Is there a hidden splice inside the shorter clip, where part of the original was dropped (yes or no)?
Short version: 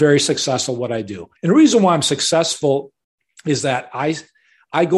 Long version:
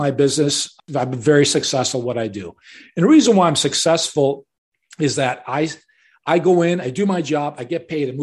yes